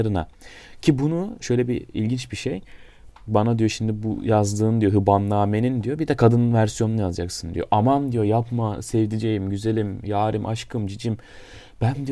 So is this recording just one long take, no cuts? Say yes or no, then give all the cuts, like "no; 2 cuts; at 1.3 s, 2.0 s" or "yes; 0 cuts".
no; 1 cut; at 3.1 s